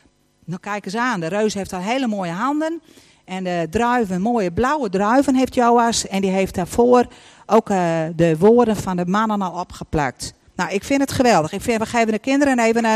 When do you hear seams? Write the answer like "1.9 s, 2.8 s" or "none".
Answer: none